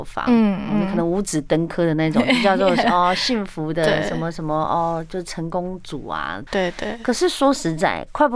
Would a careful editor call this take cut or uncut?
cut